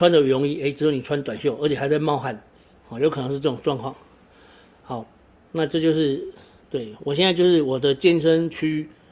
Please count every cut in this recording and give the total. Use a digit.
0